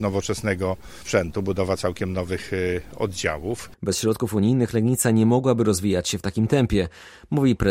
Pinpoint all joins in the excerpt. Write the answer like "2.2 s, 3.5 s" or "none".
none